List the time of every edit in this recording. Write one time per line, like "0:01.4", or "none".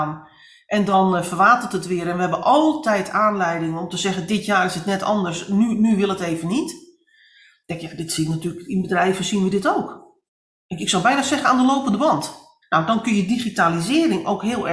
0:12.6